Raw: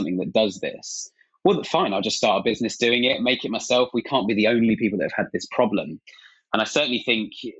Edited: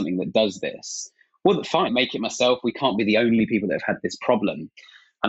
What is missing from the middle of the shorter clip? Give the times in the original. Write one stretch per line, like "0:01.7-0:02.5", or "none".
0:01.9-0:03.2